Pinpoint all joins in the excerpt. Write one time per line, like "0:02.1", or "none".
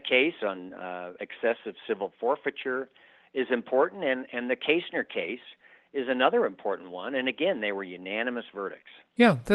none